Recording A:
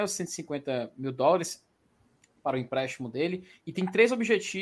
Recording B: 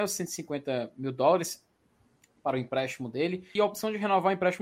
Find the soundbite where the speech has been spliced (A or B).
B